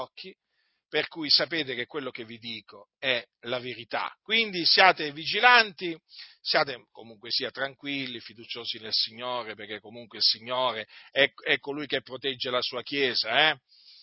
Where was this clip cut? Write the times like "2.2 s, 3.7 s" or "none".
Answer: none